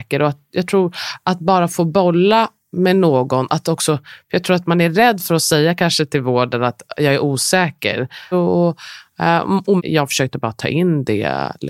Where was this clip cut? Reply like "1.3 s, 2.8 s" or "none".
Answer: 8.3 s, 9.8 s